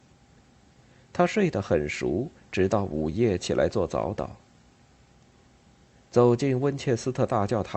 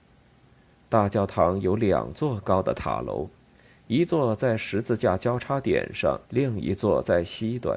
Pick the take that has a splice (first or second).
second